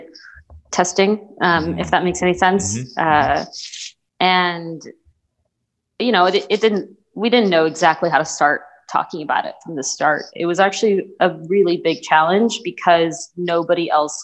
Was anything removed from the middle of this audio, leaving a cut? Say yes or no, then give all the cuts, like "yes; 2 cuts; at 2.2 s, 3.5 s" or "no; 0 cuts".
no; 0 cuts